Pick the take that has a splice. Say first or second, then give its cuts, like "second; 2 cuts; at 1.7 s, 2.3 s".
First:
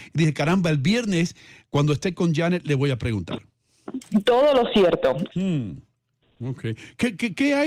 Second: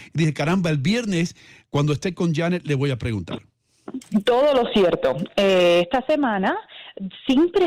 first; 1 cut; at 5.3 s